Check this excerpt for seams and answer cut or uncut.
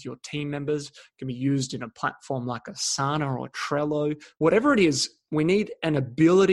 cut